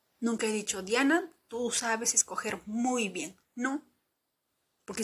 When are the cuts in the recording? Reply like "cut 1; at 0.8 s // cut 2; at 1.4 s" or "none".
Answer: none